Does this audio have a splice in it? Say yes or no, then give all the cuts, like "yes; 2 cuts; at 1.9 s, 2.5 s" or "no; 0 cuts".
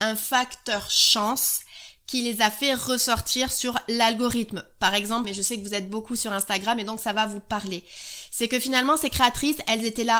yes; 1 cut; at 5.2 s